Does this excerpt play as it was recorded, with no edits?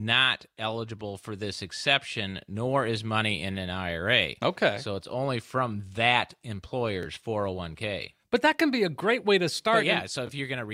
yes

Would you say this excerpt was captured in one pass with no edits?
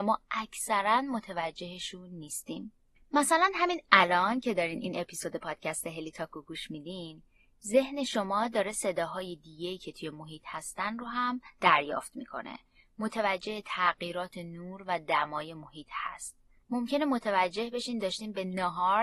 no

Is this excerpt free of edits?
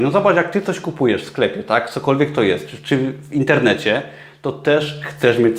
yes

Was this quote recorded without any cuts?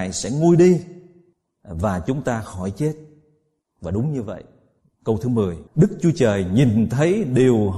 no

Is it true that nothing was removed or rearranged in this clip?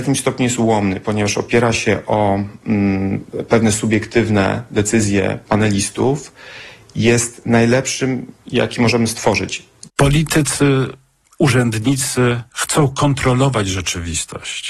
no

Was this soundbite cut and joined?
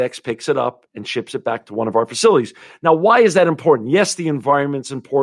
no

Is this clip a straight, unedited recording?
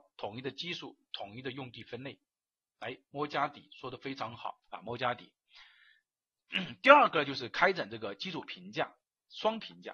no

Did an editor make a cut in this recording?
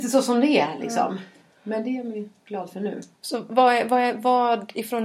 yes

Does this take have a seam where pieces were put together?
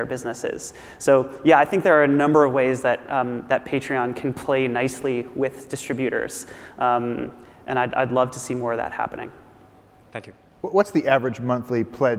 no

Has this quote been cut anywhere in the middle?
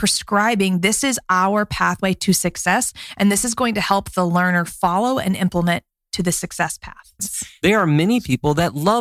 yes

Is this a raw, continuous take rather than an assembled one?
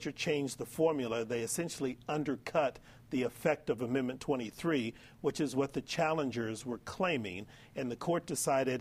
yes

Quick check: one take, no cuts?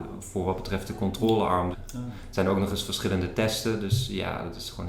no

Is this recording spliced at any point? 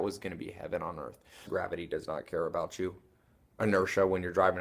yes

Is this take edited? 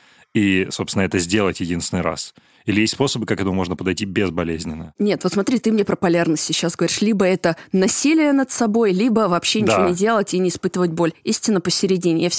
no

